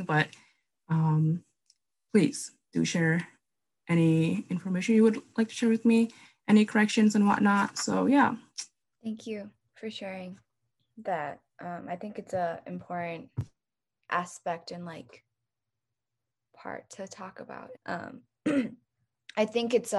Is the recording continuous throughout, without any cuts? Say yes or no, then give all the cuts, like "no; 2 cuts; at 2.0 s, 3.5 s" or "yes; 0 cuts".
no; 1 cut; at 17.8 s